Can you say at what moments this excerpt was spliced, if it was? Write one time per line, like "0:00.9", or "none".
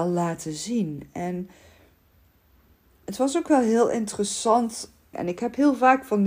0:05.1